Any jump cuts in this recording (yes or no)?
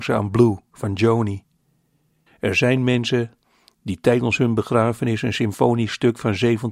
yes